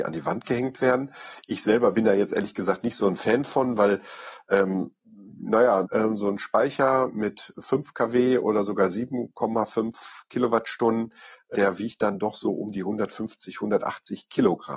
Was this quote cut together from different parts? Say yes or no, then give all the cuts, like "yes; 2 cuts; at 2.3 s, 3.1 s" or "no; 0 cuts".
yes; 2 cuts; at 5.8 s, 11.5 s